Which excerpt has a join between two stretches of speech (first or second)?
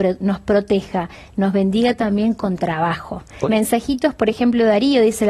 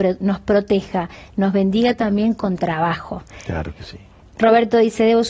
first